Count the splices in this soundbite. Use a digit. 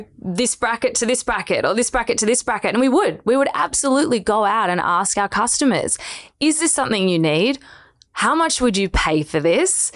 0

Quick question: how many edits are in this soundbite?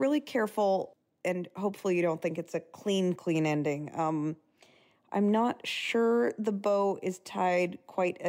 0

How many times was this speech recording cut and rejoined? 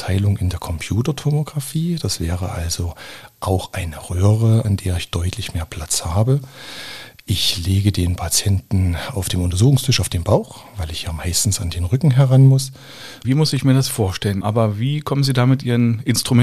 3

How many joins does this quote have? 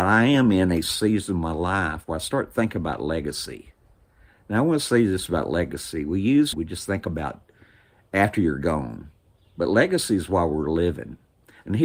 1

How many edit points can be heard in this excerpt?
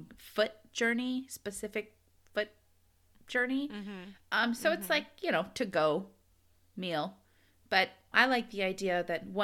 1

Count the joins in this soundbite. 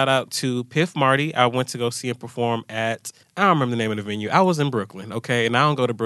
1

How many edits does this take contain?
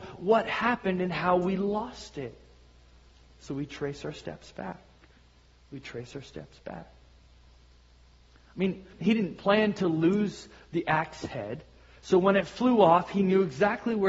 1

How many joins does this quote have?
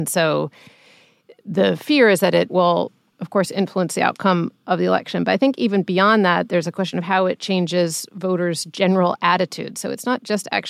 0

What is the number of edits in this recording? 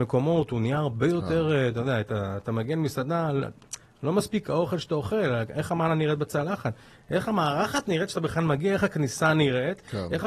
0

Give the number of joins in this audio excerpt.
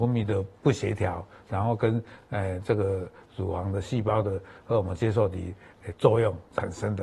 0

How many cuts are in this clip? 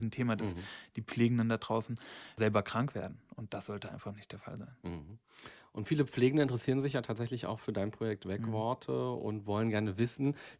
0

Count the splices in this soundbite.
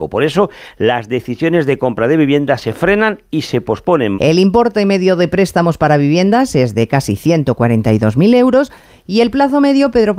1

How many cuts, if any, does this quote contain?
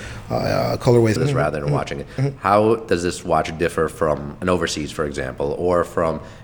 1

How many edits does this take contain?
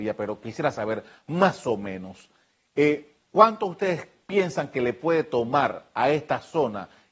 0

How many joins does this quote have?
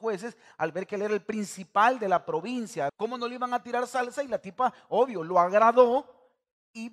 1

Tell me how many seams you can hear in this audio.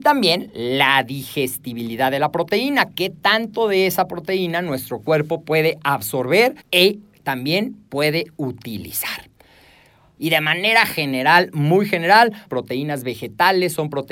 3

